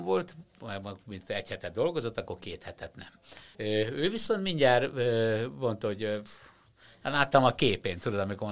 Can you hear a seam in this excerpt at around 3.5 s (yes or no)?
yes